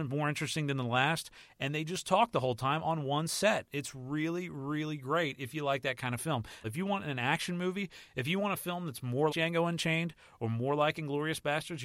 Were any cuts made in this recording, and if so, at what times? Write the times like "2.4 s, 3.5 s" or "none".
6.6 s, 9.3 s